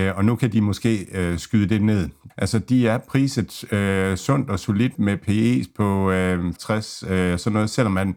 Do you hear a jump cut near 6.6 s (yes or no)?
yes